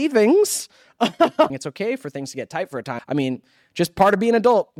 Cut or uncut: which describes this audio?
cut